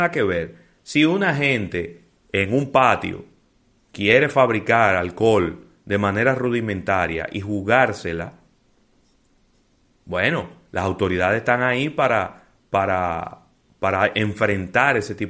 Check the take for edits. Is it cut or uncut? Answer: uncut